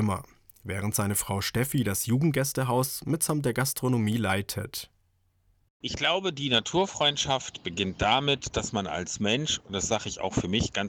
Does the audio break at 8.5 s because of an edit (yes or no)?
no